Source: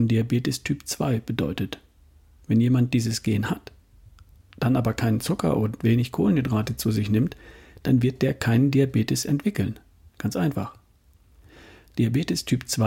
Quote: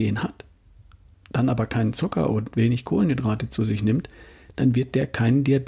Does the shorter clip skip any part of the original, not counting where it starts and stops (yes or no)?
no